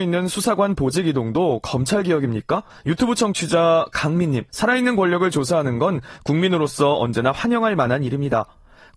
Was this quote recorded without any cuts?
no; 2 cuts; at 2.7 s, 4.5 s

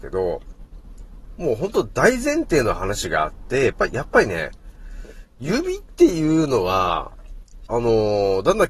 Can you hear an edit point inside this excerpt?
yes; 1 cut; at 7.7 s

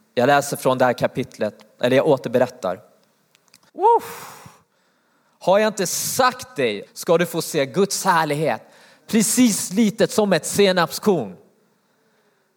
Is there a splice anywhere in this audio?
yes; 2 cuts; at 3.7 s, 6.9 s

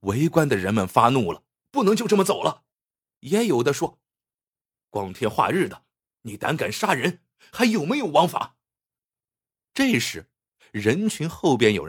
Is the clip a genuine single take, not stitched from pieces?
no; 2 cuts; at 1.6 s, 2.7 s

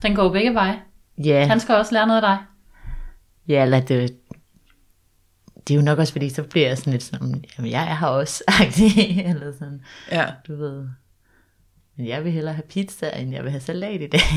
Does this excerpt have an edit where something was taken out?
no; 0 cuts

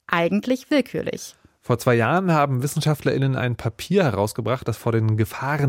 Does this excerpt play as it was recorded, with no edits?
yes; 0 cuts

